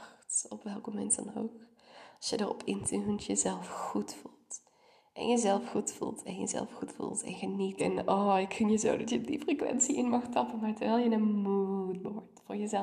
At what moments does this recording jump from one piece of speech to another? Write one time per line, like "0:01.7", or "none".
0:07.8